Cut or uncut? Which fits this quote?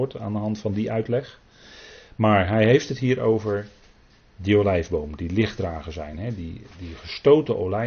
uncut